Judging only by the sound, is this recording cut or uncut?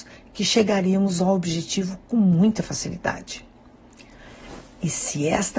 uncut